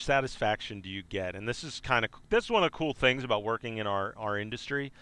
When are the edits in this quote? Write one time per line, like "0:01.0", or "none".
none